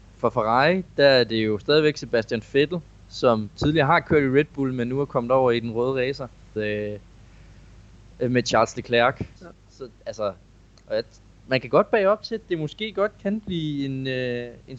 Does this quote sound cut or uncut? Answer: cut